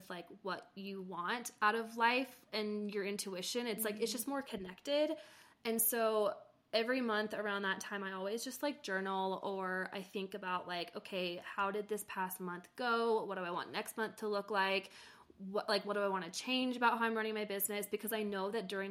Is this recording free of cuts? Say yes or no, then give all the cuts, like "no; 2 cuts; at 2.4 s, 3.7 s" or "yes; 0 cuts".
yes; 0 cuts